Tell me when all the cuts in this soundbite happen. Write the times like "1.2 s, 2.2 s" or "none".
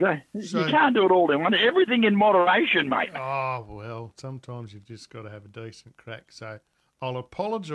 none